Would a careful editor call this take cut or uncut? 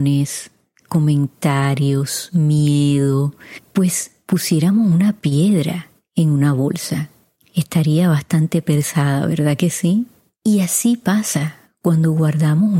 uncut